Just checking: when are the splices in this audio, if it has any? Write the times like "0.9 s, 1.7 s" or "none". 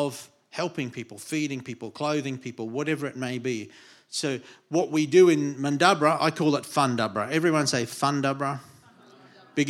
none